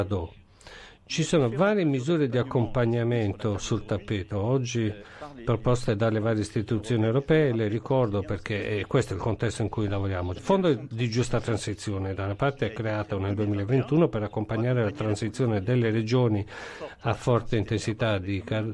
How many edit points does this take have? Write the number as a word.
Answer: one